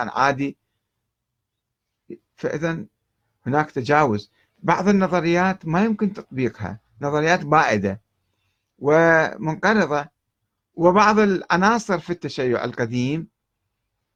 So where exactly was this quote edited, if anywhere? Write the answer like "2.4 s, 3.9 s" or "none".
none